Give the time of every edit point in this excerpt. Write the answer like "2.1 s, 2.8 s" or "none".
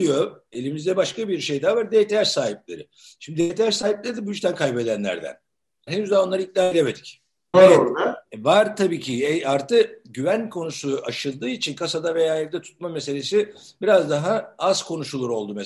5.9 s, 7.5 s